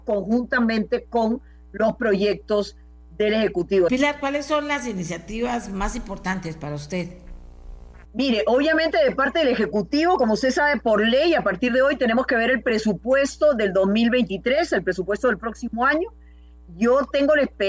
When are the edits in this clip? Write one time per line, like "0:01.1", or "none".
0:03.9
0:08.0